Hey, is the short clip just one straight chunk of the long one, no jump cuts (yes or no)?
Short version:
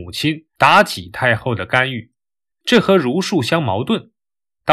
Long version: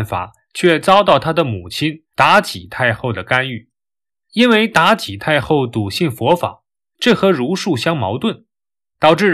no